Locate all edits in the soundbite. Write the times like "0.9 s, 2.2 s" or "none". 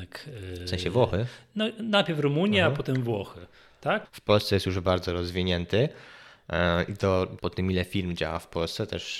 4.0 s, 7.4 s